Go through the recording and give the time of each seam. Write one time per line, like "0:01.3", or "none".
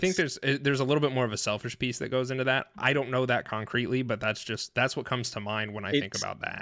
none

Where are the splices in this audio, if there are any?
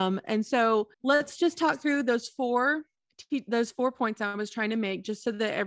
0:00.9

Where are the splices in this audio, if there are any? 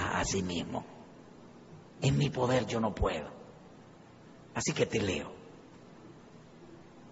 none

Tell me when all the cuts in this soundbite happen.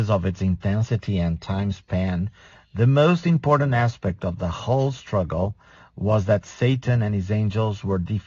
none

